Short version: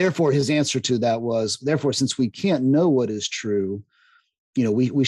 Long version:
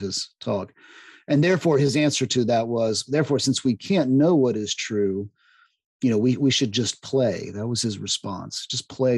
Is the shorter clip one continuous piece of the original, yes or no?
yes